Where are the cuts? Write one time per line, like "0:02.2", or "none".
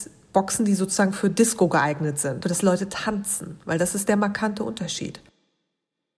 0:02.4